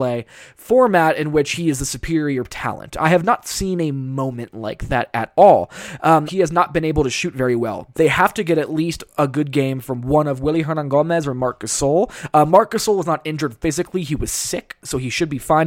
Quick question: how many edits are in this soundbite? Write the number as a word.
two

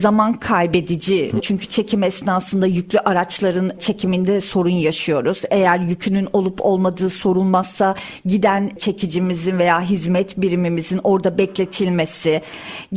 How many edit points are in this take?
one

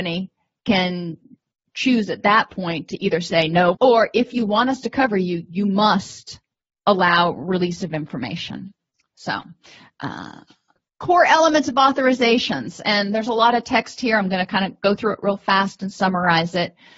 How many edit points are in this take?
one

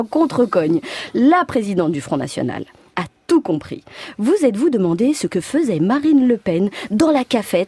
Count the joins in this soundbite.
one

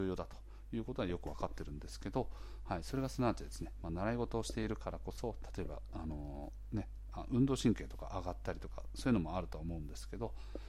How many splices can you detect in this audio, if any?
zero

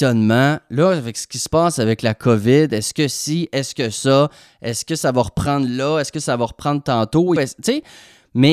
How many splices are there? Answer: one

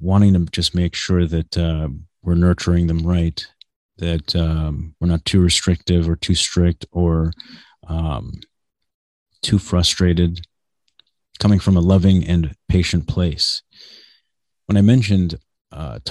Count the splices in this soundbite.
one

